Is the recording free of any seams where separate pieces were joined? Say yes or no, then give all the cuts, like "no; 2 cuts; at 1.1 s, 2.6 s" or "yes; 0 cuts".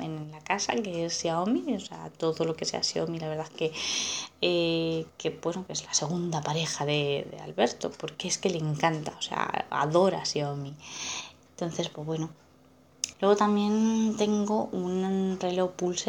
no; 2 cuts; at 11.5 s, 13.1 s